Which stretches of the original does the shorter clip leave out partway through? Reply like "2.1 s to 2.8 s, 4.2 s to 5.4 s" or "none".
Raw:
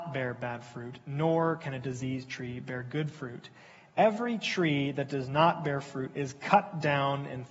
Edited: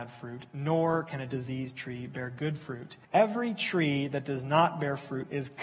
3.6 s to 3.9 s